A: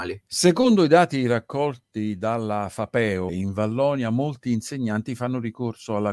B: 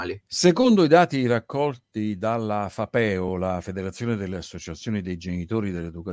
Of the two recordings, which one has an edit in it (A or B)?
A